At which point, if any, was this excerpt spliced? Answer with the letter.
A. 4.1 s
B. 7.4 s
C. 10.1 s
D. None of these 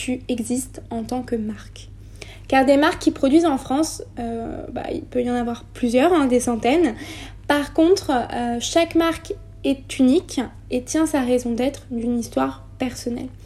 D